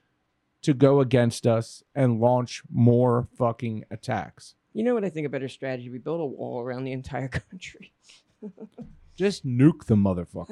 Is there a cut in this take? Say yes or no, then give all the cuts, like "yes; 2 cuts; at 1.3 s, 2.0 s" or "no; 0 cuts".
no; 0 cuts